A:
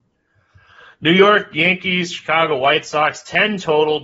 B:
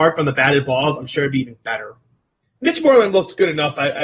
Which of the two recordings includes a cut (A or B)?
B